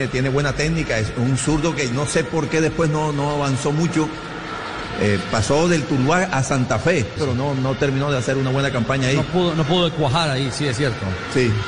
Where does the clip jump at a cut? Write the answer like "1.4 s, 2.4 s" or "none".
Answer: 7.2 s